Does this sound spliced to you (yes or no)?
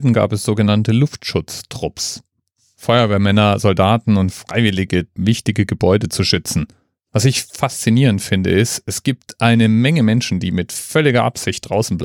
yes